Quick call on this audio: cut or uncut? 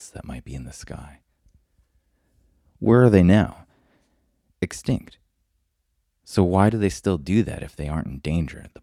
uncut